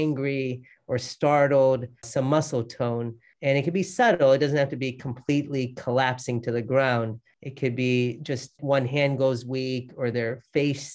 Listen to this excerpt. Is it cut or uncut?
cut